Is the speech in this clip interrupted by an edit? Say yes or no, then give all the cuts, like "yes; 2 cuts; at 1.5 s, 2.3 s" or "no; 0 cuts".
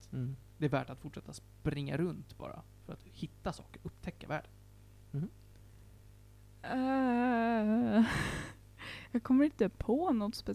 no; 0 cuts